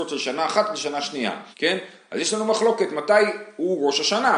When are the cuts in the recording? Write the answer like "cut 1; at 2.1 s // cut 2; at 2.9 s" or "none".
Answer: cut 1; at 1.5 s